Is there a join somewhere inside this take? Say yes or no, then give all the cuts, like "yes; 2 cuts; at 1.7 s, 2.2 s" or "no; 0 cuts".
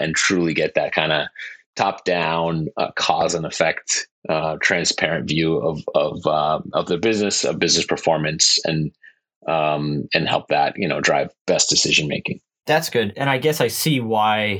no; 0 cuts